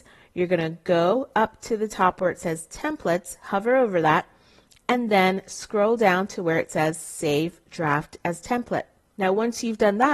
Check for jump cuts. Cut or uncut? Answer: cut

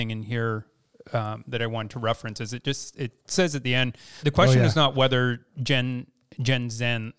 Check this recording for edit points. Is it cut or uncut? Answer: cut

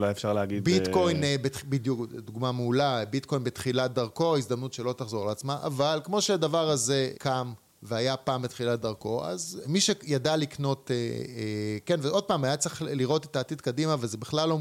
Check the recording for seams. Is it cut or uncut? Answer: cut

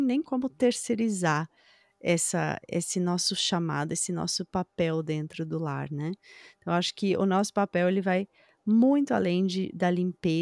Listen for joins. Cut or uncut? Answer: uncut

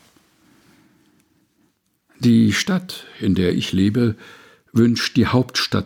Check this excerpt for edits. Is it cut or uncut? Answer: uncut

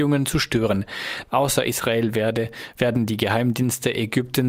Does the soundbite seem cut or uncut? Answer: cut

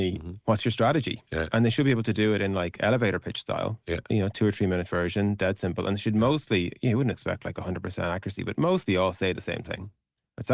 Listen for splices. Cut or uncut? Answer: uncut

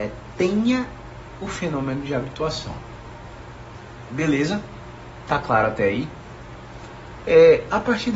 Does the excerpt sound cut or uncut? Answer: cut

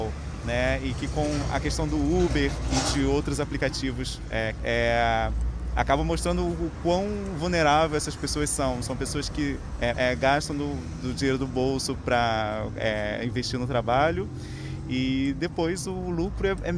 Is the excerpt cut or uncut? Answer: cut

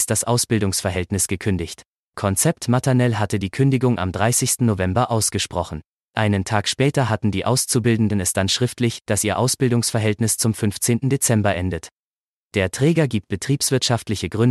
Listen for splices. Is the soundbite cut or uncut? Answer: uncut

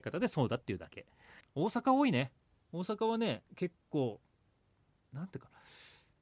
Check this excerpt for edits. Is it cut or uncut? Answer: cut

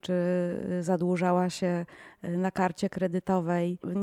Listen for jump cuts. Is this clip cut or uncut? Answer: uncut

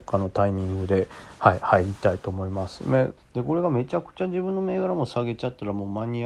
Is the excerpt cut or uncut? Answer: cut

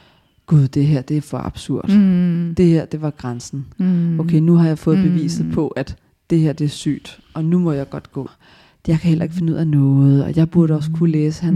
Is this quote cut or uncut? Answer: cut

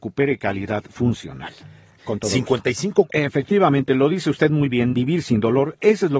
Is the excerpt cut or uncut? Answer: cut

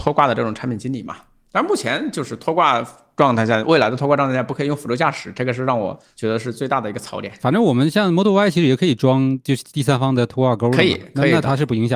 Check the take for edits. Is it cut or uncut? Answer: uncut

